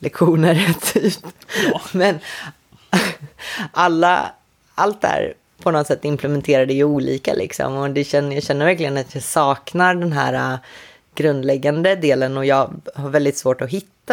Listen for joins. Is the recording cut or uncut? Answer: uncut